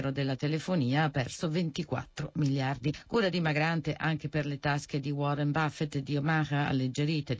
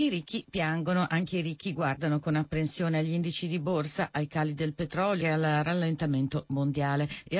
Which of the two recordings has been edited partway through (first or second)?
second